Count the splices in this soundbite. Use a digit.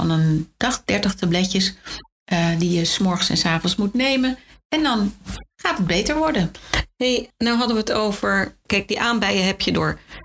0